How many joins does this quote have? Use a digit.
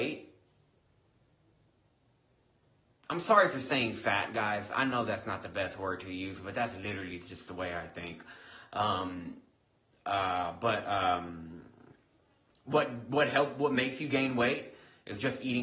0